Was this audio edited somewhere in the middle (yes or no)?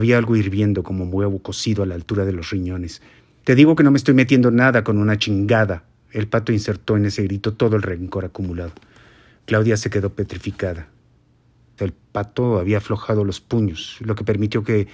yes